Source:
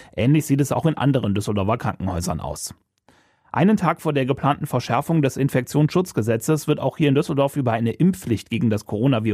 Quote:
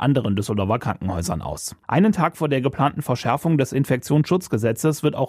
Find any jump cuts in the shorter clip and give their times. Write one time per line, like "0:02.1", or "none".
0:01.8